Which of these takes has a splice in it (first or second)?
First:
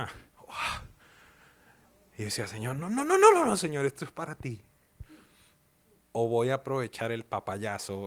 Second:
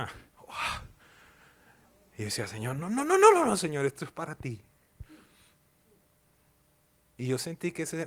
first